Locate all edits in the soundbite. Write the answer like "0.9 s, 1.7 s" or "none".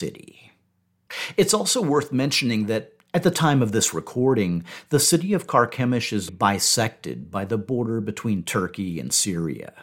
6.3 s